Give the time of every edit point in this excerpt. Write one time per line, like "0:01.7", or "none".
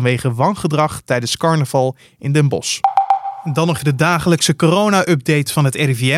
0:03.8

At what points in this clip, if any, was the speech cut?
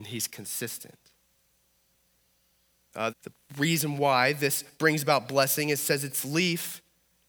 0:03.1

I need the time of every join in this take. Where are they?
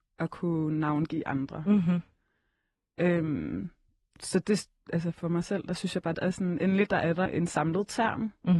0:06.1
0:07.3

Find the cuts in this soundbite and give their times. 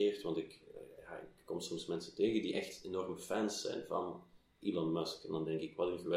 none

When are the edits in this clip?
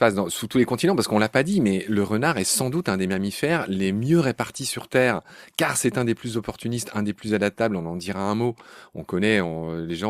none

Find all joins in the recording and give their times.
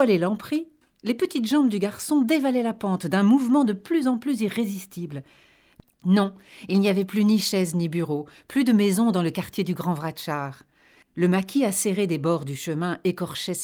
0:11.0

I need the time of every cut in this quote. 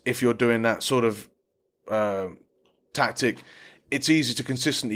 none

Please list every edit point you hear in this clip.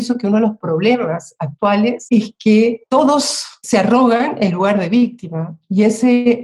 none

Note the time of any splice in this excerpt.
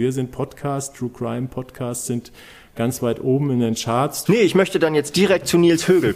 0:04.3

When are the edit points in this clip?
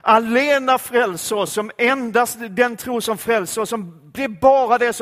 none

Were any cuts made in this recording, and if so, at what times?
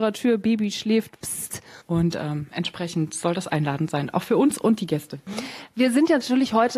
0:01.8

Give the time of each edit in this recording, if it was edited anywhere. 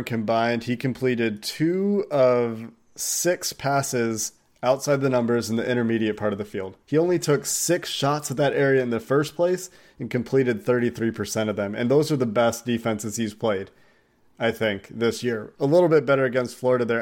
0:06.8

